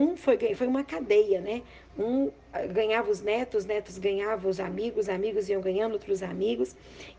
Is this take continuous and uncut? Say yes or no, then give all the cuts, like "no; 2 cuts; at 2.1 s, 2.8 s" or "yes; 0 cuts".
yes; 0 cuts